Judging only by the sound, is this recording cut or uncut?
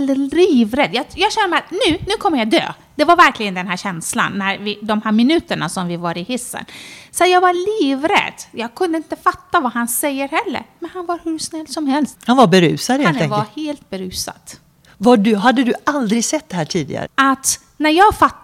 cut